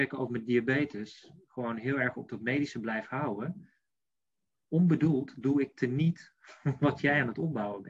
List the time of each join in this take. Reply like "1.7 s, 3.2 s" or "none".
none